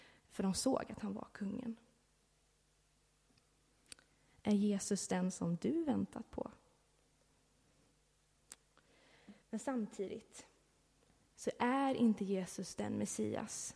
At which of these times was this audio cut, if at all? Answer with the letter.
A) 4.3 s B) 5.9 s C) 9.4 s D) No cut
C